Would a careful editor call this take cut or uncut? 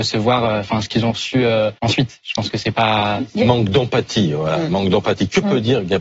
cut